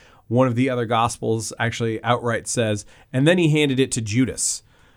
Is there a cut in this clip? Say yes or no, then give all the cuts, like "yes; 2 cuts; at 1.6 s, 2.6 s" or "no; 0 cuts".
no; 0 cuts